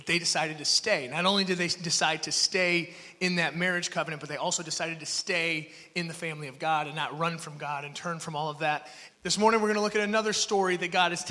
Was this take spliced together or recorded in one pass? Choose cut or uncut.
cut